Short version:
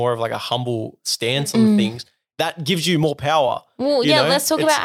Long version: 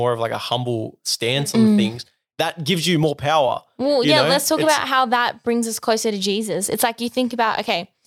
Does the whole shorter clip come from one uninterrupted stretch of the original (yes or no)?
yes